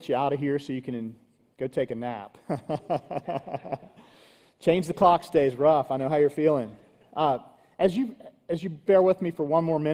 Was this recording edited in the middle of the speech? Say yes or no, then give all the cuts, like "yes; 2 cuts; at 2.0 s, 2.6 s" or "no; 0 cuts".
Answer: no; 0 cuts